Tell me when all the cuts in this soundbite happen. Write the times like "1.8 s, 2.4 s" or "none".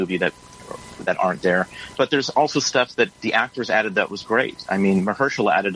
1.9 s